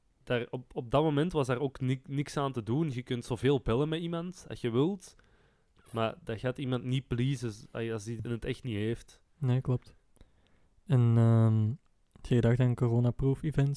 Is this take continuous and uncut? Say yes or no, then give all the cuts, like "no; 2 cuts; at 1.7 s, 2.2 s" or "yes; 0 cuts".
no; 1 cut; at 8.2 s